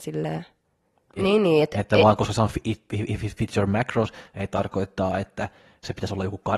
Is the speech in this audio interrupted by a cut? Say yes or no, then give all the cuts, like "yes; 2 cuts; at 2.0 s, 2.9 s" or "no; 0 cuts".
yes; 1 cut; at 1.2 s